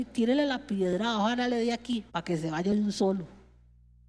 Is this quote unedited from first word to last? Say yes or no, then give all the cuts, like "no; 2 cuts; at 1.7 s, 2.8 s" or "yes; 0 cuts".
no; 1 cut; at 2.1 s